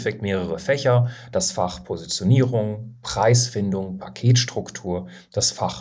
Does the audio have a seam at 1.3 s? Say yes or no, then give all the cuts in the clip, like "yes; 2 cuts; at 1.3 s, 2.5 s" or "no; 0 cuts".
no; 0 cuts